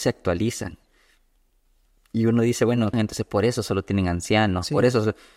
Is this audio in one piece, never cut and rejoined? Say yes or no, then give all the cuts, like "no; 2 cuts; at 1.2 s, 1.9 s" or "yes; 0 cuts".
no; 1 cut; at 2.9 s